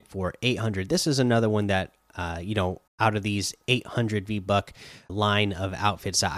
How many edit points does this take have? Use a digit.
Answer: 2